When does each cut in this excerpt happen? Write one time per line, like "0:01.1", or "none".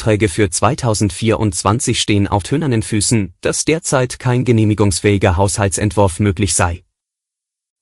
0:02.4